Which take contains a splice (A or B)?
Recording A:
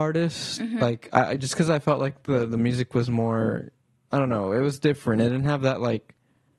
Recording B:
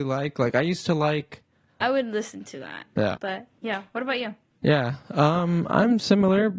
B